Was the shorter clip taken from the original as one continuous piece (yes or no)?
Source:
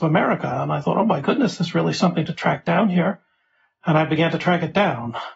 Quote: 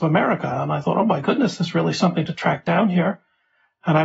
yes